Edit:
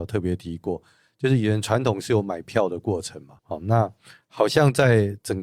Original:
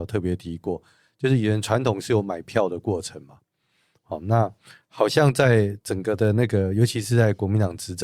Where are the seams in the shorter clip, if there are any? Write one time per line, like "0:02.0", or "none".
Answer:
0:03.4